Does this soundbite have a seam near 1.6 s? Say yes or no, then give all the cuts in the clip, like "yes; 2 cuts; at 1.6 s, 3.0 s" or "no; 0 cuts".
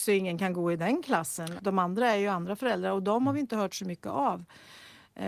yes; 1 cut; at 1.6 s